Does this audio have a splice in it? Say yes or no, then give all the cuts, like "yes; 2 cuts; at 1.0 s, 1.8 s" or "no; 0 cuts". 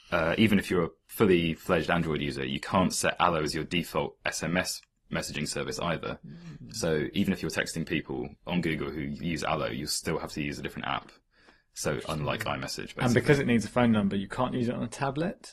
no; 0 cuts